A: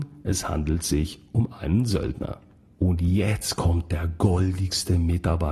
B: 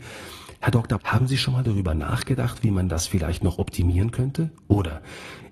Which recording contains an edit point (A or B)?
B